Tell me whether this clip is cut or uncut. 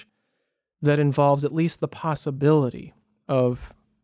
uncut